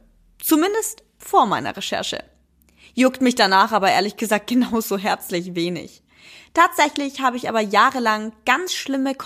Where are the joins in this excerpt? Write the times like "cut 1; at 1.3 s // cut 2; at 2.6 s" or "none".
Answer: none